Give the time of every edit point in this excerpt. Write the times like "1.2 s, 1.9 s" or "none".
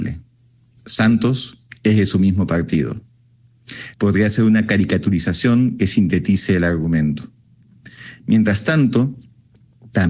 3.9 s